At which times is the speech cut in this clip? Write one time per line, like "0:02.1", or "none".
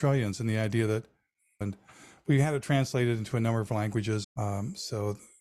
0:01.6
0:04.2